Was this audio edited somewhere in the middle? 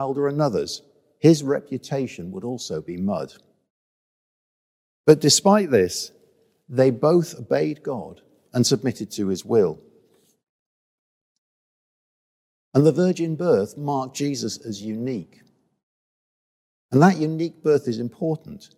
no; 0 cuts

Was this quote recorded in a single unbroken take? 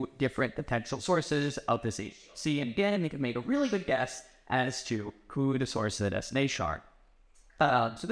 yes; 0 cuts

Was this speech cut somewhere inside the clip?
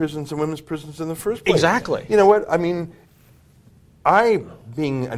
no; 0 cuts

